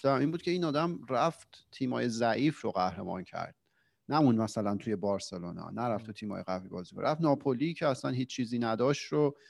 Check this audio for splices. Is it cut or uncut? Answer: uncut